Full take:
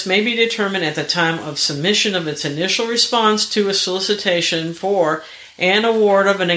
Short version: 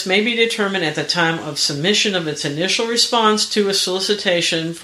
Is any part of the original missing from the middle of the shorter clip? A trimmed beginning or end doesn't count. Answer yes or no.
no